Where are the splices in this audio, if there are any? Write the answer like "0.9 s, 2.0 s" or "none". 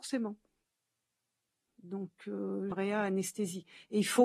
1.7 s, 2.7 s

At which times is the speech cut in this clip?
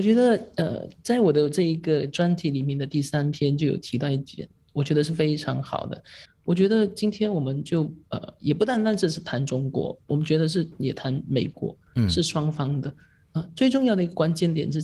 6.3 s

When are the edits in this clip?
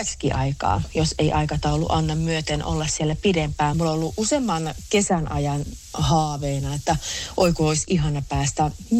3.7 s

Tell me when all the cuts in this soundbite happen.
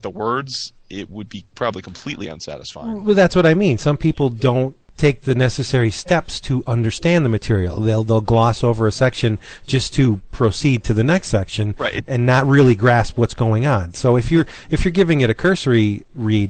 none

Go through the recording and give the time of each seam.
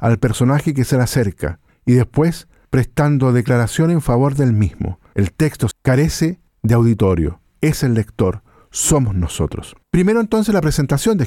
5.7 s, 7.4 s, 9.8 s

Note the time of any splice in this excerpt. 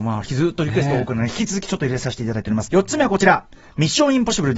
2.7 s

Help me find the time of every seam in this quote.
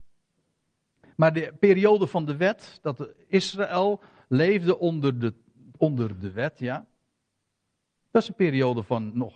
none

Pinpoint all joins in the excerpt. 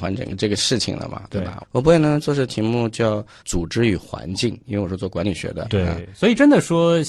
1.6 s, 5.6 s

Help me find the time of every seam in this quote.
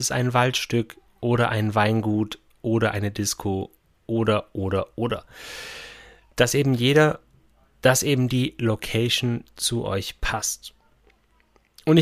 none

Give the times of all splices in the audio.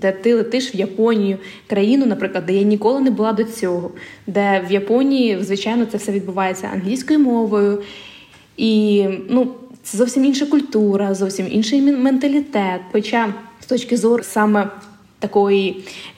12.9 s, 14.2 s

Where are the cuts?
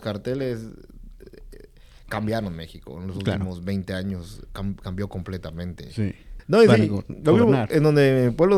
4.4 s, 6.4 s

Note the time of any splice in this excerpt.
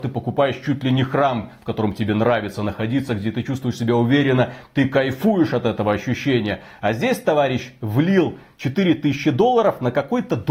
none

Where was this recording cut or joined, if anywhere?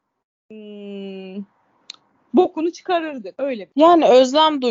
none

